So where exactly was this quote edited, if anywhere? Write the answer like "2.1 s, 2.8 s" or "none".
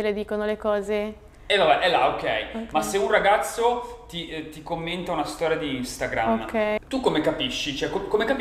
6.8 s